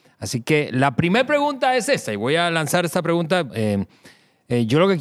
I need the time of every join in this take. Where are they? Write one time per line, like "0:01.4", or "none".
0:03.5